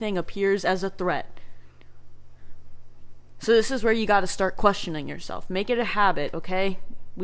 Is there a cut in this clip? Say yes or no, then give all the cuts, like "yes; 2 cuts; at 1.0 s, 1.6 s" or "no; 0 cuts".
no; 0 cuts